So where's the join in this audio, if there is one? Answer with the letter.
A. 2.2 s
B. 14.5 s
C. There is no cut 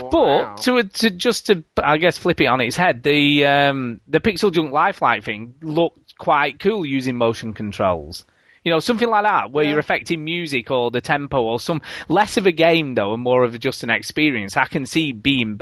C